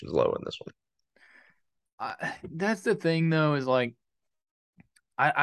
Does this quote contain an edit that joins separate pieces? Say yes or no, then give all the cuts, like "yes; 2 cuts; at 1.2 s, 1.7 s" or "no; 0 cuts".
no; 0 cuts